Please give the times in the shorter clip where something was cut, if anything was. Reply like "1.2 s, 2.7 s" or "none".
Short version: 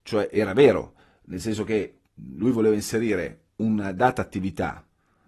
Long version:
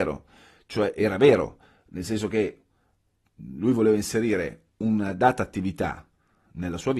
2.1 s